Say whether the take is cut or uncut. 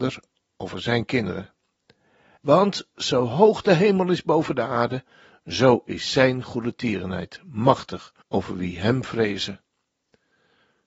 cut